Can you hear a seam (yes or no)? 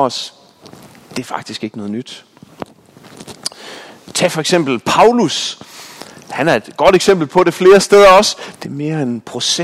yes